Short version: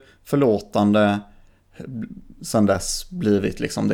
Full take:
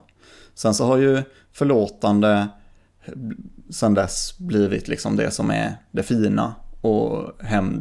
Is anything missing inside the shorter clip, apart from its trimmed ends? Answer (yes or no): no